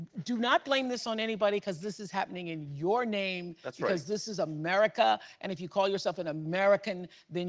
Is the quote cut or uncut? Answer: uncut